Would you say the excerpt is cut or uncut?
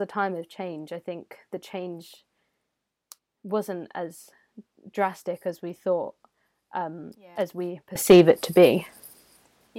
uncut